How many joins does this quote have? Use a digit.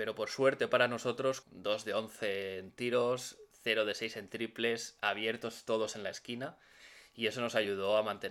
1